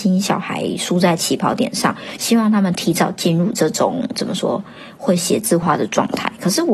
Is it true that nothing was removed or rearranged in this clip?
no; 2 cuts; at 2.2 s, 5.6 s

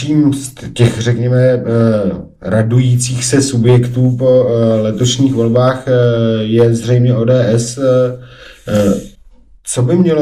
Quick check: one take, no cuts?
yes; 0 cuts

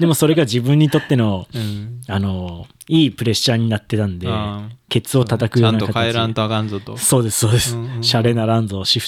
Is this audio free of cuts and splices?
yes; 0 cuts

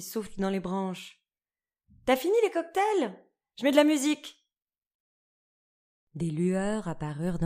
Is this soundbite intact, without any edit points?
yes; 0 cuts

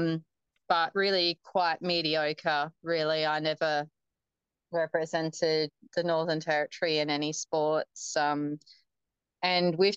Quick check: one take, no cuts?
yes; 0 cuts

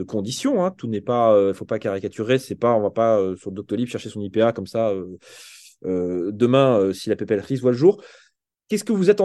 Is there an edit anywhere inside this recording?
no; 0 cuts

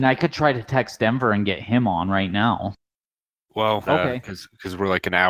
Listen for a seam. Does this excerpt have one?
yes; 1 cut; at 3.9 s

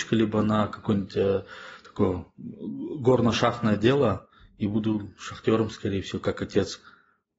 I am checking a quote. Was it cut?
no; 0 cuts

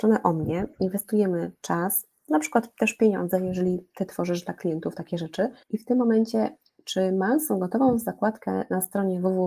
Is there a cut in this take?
yes; 1 cut; at 5.6 s

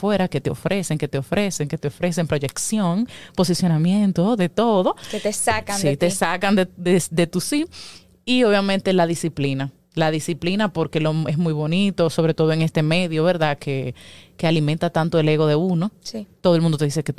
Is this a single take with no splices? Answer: yes; 0 cuts

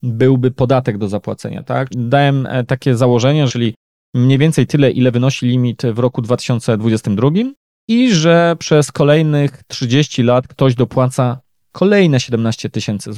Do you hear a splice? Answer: yes; 2 cuts; at 1.9 s, 3.5 s

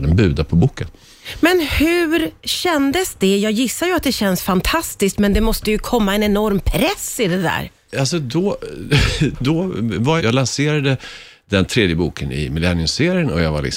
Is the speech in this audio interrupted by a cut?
yes; 1 cut; at 10.2 s

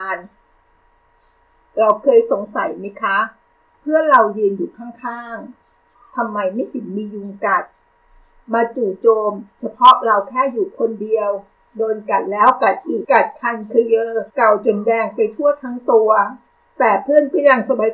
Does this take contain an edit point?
yes; 2 cuts; at 13.0 s, 14.3 s

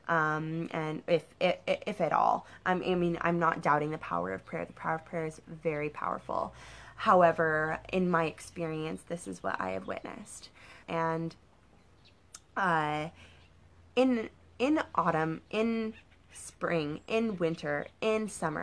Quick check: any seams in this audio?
yes; 1 cut; at 10.8 s

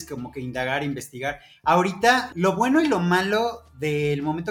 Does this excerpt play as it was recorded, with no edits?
yes; 0 cuts

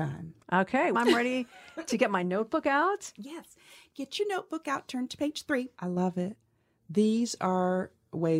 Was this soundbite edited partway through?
yes; 2 cuts; at 0.9 s, 5.7 s

